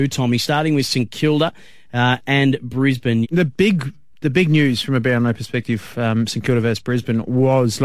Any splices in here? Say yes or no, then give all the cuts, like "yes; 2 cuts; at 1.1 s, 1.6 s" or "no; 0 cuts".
yes; 1 cut; at 3.2 s